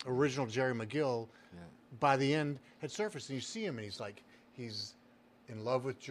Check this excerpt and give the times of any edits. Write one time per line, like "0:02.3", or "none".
none